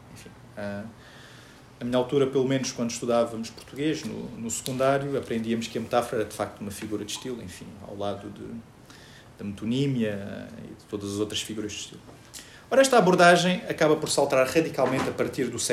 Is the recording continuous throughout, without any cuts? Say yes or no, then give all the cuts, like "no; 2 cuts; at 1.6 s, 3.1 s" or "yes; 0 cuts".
yes; 0 cuts